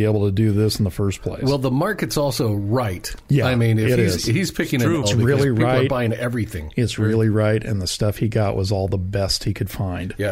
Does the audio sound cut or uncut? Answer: cut